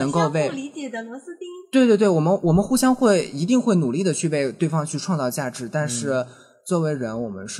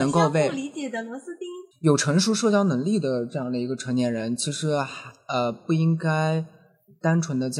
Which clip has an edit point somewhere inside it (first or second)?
second